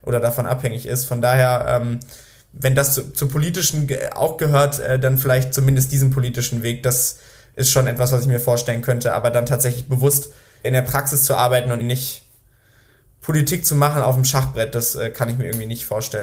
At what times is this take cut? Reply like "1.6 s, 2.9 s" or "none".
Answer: 10.6 s, 11.8 s